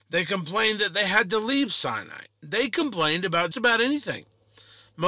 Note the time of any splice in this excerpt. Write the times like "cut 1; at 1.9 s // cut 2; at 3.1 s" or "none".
cut 1; at 3.5 s